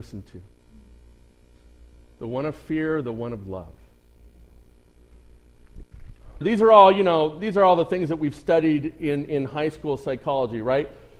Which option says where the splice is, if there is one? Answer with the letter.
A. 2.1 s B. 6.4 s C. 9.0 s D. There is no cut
B